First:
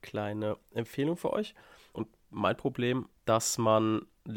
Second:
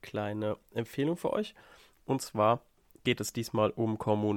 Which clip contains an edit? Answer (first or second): first